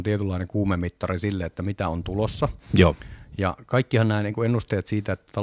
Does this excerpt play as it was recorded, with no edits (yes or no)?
yes